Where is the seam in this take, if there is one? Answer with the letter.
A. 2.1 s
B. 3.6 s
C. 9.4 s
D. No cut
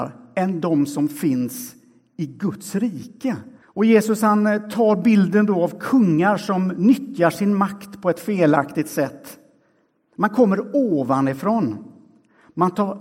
B